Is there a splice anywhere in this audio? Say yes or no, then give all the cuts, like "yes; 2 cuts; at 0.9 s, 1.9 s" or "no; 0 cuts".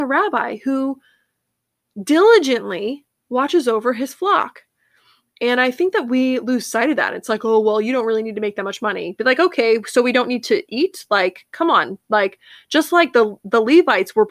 no; 0 cuts